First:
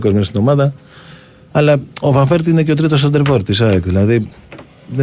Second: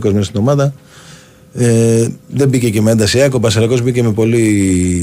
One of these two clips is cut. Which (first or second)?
first